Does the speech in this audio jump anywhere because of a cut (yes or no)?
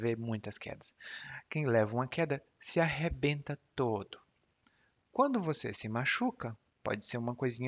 yes